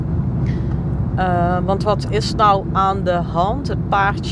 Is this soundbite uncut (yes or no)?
yes